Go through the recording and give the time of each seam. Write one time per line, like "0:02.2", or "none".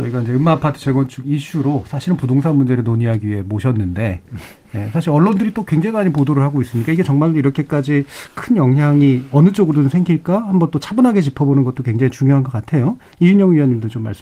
none